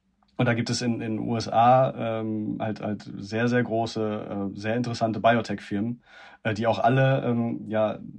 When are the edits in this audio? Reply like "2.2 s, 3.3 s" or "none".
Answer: none